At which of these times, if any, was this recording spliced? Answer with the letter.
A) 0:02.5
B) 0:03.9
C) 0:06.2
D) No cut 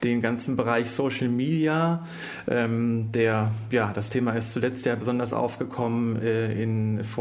D